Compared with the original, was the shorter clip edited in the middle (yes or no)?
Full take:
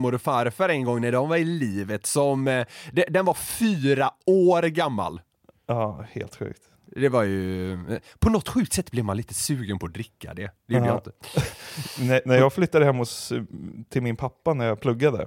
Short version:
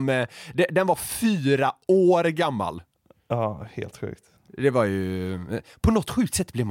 no